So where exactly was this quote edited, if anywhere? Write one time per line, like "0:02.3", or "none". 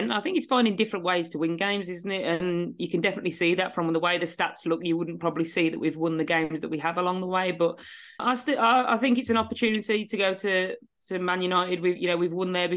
0:08.2